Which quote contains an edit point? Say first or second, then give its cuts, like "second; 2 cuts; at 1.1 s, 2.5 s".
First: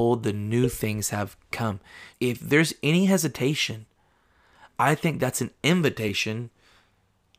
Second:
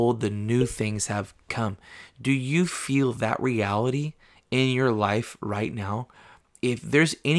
first; 1 cut; at 2.1 s